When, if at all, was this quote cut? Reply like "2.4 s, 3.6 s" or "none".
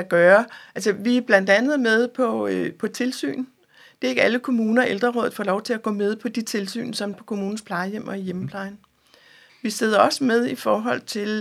7.1 s, 9.5 s